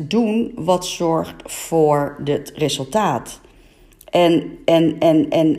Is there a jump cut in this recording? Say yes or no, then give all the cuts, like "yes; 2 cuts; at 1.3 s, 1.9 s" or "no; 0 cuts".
no; 0 cuts